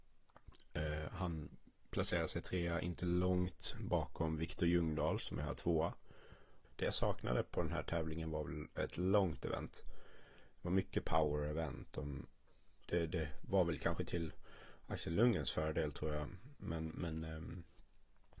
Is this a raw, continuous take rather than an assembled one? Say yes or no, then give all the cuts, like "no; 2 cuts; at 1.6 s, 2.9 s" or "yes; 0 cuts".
no; 2 cuts; at 6.6 s, 12.8 s